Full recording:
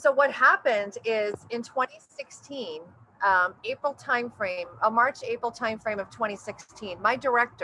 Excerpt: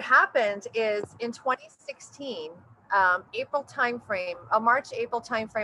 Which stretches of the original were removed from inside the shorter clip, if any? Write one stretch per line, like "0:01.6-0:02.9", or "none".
none